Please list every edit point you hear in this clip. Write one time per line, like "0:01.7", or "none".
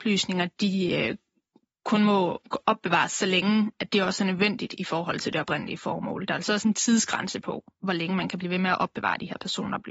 none

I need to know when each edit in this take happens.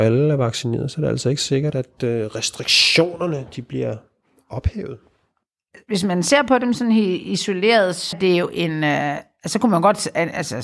0:08.1

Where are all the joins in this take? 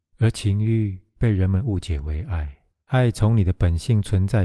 0:02.8

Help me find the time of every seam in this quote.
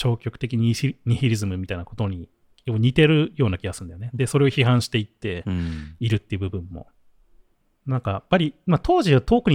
none

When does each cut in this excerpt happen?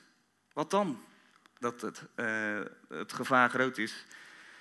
0:01.6

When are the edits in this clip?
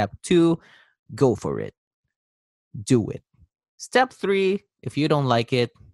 none

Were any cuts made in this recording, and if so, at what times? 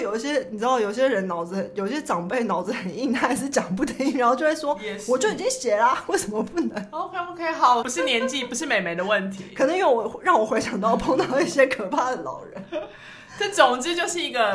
0:07.8

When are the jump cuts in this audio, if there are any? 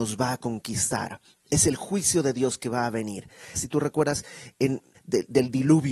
0:03.5
0:04.9

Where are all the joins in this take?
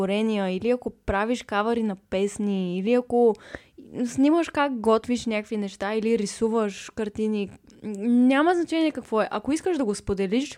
none

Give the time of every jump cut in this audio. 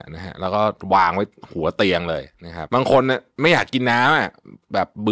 0:02.7

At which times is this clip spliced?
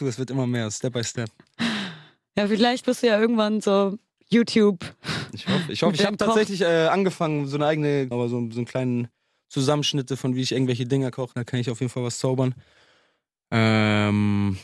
0:08.1
0:11.3

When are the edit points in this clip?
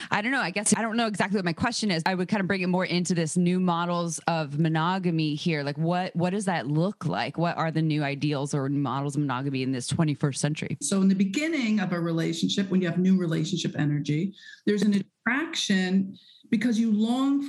0:10.8

